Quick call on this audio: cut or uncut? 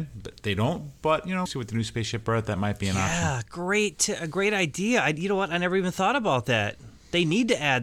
cut